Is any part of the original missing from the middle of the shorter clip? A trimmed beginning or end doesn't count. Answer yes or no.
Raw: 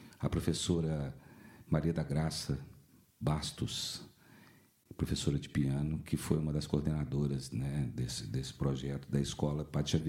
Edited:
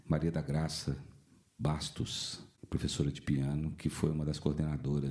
yes